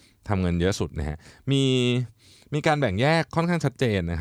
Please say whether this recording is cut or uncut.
uncut